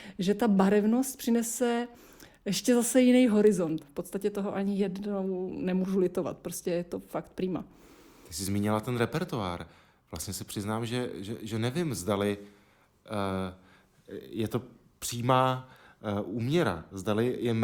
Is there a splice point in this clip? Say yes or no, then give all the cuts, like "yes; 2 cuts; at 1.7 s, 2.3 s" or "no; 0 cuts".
yes; 1 cut; at 3.8 s